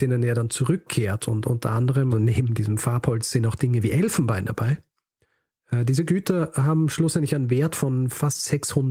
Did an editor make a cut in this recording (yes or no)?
yes